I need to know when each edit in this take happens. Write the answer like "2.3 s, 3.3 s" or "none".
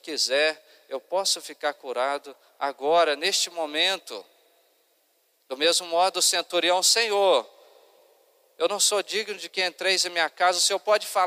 none